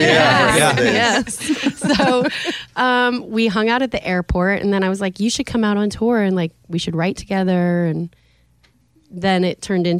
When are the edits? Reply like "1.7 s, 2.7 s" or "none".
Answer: none